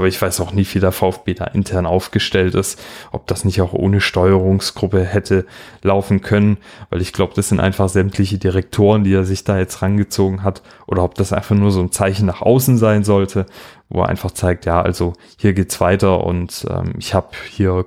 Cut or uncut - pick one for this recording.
uncut